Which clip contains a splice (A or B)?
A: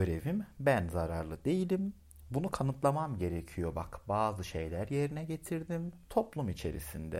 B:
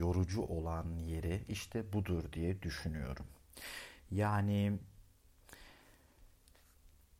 A